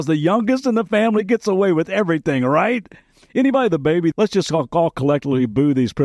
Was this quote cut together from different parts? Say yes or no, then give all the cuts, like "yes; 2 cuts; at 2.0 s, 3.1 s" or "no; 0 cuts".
yes; 1 cut; at 4.1 s